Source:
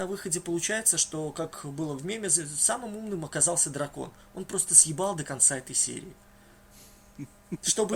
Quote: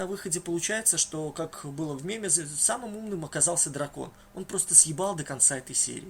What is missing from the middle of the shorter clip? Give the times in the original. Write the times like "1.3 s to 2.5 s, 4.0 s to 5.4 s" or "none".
none